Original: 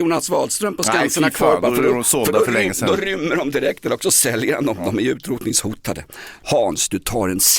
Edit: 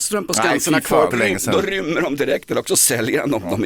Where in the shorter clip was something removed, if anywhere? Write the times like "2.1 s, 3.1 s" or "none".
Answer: 1.1 s